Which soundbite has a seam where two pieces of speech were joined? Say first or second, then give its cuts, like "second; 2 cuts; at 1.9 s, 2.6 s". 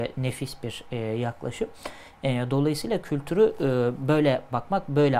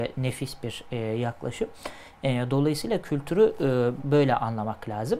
second; 1 cut; at 4.0 s